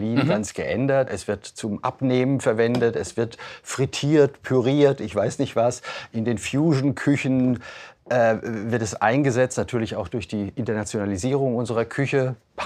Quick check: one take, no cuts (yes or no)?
no